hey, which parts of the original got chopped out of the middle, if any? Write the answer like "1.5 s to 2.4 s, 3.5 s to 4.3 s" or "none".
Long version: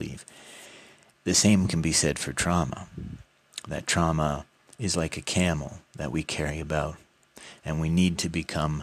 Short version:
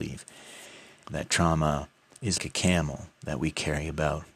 1.0 s to 3.6 s, 4.9 s to 5.1 s